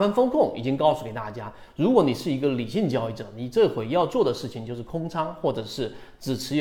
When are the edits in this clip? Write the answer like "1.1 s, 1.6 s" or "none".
none